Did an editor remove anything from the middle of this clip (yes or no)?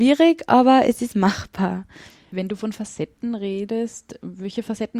no